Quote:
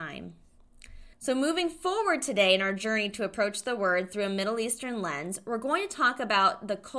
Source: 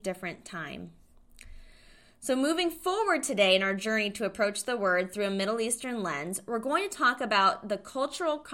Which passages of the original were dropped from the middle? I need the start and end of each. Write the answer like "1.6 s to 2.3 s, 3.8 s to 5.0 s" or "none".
1.7 s to 2.1 s